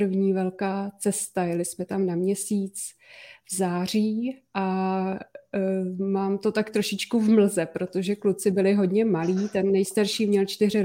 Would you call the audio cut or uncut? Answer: uncut